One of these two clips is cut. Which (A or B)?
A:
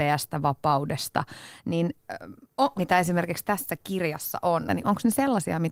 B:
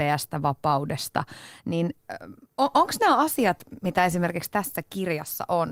A